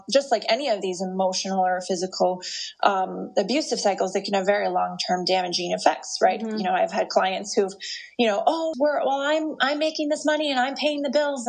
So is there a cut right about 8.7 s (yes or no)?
yes